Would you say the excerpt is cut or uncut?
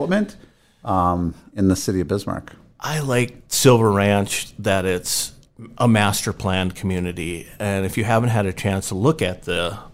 uncut